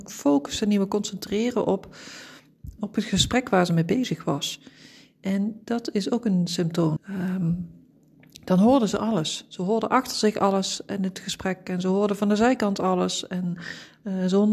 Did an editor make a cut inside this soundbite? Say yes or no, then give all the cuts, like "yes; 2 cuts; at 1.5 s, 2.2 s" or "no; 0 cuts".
yes; 2 cuts; at 2.8 s, 7.0 s